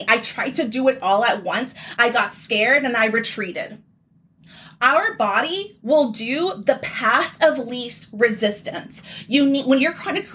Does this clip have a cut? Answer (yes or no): yes